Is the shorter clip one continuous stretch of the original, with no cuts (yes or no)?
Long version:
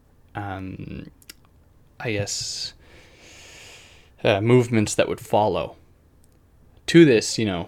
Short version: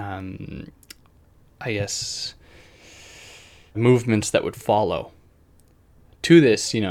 no